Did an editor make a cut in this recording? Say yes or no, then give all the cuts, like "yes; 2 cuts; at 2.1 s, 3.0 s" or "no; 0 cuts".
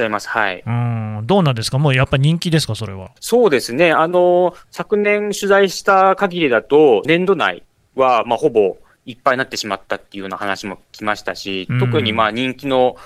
yes; 2 cuts; at 3.2 s, 7.0 s